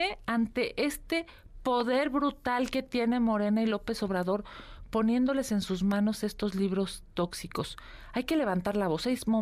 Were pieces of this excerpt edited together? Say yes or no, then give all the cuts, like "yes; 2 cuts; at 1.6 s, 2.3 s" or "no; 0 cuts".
no; 0 cuts